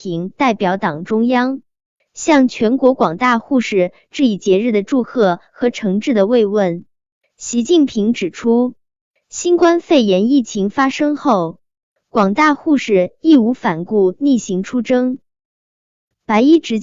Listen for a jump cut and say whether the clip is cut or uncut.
uncut